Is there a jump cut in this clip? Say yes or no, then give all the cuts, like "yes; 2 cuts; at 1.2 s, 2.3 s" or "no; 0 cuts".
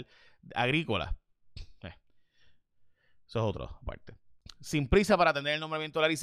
no; 0 cuts